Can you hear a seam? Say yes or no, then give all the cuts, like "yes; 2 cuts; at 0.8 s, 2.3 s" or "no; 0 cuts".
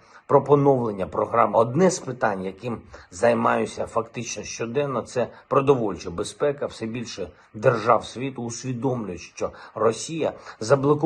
yes; 1 cut; at 1.5 s